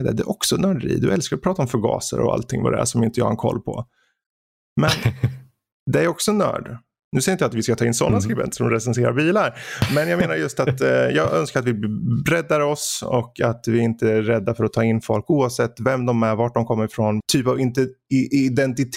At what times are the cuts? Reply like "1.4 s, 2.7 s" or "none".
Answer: 17.2 s